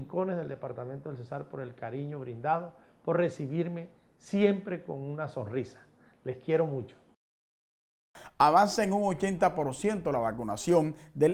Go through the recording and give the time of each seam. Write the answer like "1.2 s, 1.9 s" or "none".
none